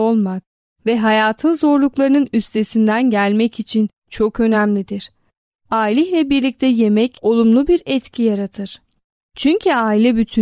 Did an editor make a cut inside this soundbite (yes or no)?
no